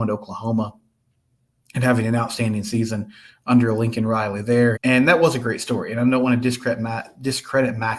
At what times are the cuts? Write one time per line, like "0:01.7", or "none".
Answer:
0:04.8